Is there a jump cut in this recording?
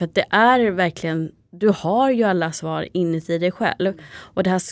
no; 0 cuts

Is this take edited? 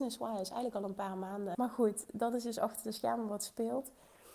yes; 1 cut; at 1.5 s

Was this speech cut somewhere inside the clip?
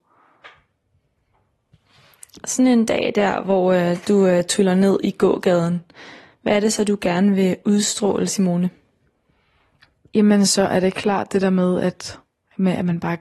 no; 0 cuts

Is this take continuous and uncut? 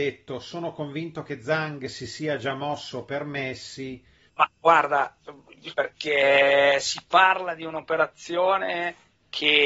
no; 2 cuts; at 4.3 s, 5.7 s

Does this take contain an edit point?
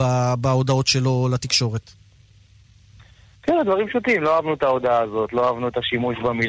no; 0 cuts

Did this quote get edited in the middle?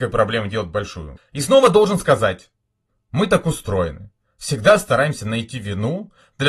yes; 1 cut; at 1.2 s

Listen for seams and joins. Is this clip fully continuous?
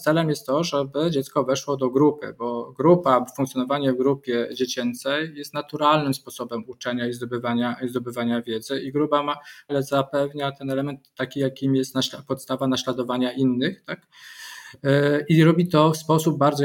no; 1 cut; at 9.7 s

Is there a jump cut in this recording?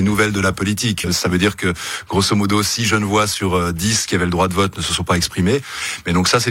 yes; 1 cut; at 1.0 s

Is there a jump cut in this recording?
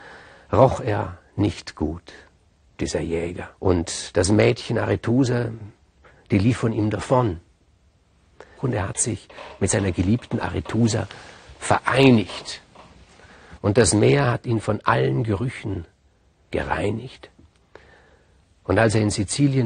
yes; 3 cuts; at 3.5 s, 8.6 s, 13.6 s

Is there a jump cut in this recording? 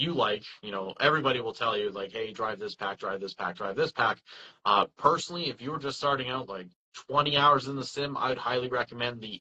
no; 0 cuts

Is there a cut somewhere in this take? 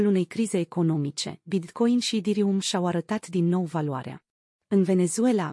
yes; 1 cut; at 4.5 s

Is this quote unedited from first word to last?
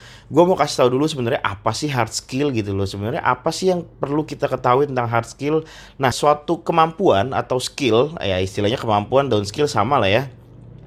no; 1 cut; at 6.1 s

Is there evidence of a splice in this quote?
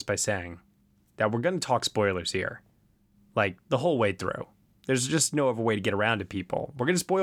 no; 0 cuts

